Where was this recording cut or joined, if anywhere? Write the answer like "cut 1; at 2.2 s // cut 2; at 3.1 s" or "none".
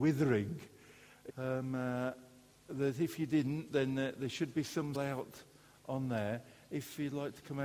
cut 1; at 1.3 s // cut 2; at 4.9 s